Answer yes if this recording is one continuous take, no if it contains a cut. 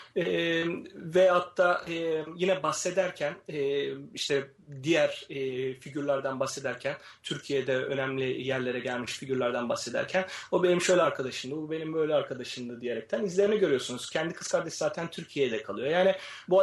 yes